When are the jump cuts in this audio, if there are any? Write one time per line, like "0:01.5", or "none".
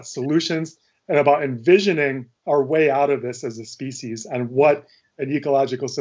0:02.4